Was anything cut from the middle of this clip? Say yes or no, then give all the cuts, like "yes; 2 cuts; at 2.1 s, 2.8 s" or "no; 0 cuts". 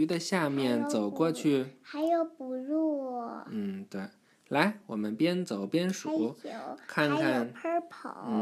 no; 0 cuts